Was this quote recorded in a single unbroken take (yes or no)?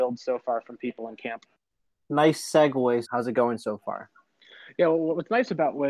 no